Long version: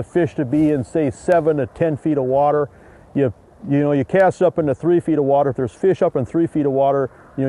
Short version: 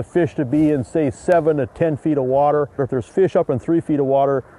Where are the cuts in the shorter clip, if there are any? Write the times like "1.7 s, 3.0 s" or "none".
2.8 s